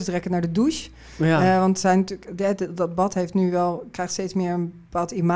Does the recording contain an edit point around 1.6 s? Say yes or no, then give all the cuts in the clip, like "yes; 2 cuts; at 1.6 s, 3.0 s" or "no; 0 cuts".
no; 0 cuts